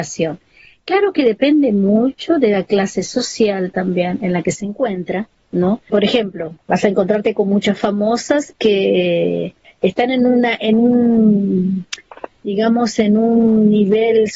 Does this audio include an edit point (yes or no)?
yes